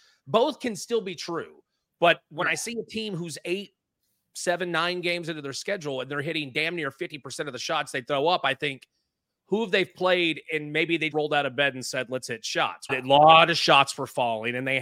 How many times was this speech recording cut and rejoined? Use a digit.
2